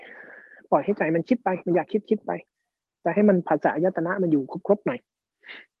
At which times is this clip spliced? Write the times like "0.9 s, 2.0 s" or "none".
none